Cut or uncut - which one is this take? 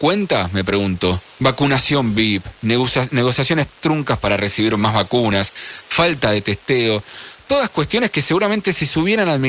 cut